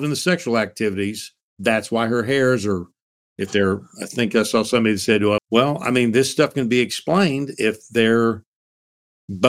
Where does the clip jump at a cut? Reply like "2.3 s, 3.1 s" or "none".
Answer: 5.4 s